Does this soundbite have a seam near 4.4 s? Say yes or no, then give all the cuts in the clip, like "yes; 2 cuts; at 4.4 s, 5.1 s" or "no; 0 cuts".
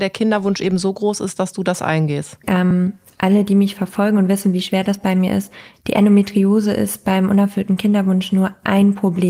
no; 1 cut; at 2.4 s